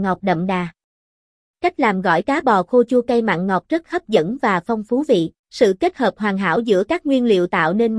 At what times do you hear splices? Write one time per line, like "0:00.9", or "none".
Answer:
0:05.4